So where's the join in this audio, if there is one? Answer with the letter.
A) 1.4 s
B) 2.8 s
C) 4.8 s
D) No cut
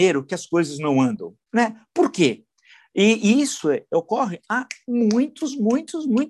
A